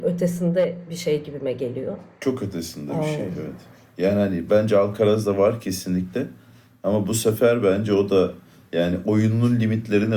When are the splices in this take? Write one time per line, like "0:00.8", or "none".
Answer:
none